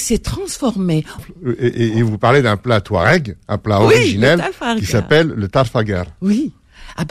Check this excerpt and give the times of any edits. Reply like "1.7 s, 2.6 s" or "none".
1.2 s